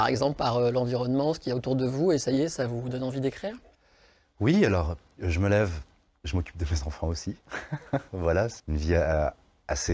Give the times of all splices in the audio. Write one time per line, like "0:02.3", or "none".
0:08.6